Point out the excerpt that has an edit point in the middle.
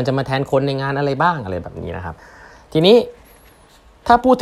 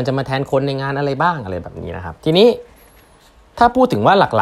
second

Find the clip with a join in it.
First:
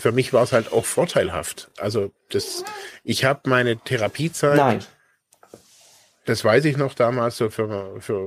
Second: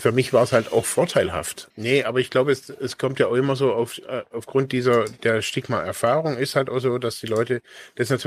second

